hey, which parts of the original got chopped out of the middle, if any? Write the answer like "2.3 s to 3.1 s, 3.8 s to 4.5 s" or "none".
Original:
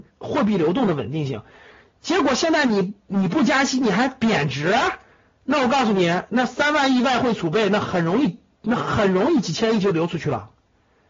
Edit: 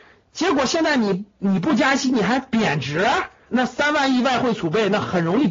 5.2 s to 6.3 s